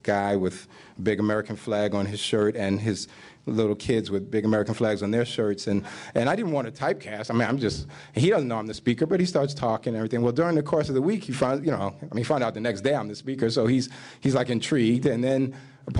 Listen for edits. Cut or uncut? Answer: uncut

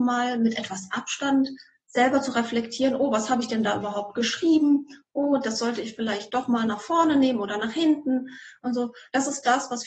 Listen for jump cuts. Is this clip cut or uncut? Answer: uncut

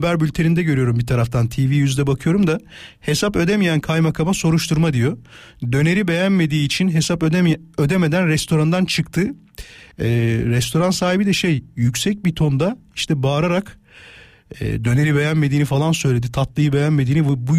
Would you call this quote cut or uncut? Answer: uncut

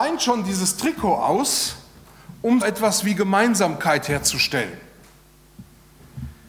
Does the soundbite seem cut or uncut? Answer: cut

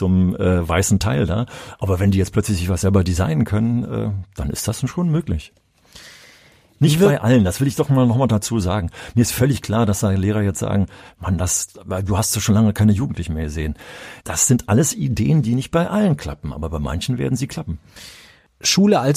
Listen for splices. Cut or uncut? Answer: cut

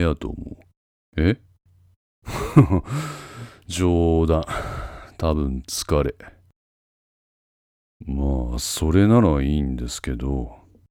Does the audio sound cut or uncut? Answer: uncut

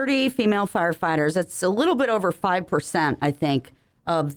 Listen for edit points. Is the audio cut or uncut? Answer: uncut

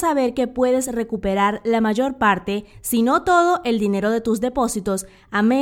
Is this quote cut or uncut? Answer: uncut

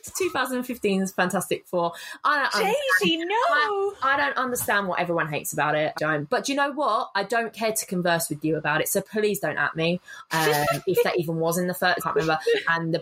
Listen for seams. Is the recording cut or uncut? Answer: cut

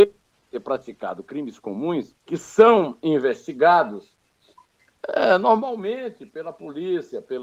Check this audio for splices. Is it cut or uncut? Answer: cut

